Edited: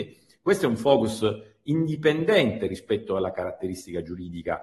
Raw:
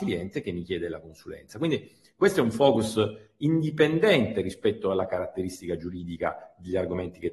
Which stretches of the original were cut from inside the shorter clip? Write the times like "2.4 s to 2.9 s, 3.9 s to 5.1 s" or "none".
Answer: none